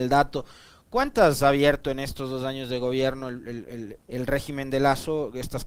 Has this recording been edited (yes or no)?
yes